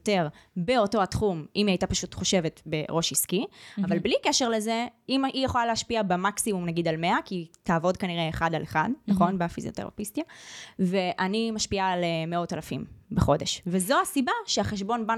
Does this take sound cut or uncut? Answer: uncut